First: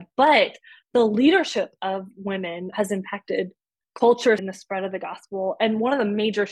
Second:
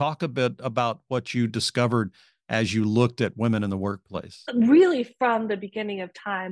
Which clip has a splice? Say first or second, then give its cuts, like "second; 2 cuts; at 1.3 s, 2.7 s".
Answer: first; 2 cuts; at 2.7 s, 4.4 s